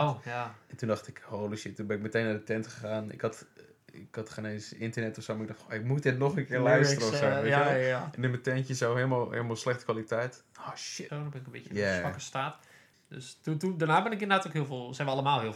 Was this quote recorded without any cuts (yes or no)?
no